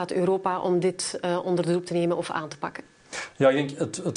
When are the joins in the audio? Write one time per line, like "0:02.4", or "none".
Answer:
none